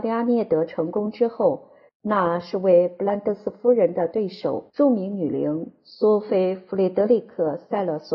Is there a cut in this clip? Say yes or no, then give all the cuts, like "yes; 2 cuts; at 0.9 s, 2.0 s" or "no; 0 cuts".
yes; 2 cuts; at 1.9 s, 4.7 s